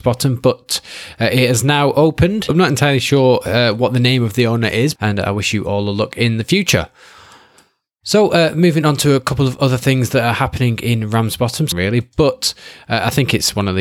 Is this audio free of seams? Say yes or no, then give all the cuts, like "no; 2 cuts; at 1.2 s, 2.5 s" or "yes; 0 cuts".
no; 3 cuts; at 2.5 s, 5.0 s, 11.7 s